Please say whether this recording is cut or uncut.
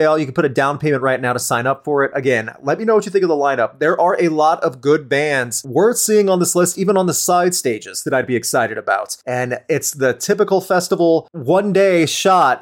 uncut